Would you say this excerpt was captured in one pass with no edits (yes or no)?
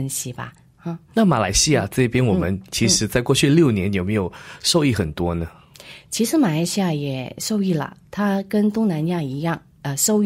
yes